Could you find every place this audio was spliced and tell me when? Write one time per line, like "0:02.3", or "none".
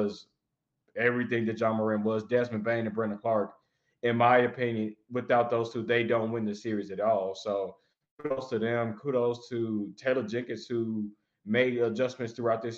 none